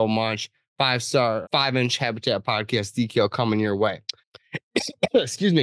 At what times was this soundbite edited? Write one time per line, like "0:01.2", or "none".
0:01.4
0:04.2